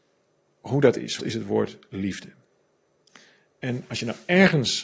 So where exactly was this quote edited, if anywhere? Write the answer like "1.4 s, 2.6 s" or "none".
1.2 s